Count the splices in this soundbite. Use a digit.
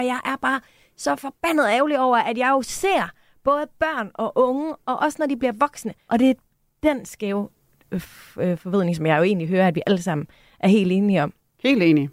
1